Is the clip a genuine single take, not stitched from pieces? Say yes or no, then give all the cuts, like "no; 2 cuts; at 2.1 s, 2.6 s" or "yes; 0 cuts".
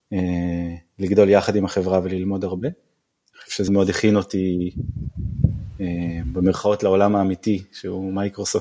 no; 1 cut; at 3.7 s